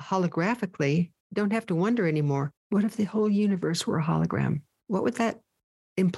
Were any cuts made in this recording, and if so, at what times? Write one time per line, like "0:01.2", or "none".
0:01.2
0:02.6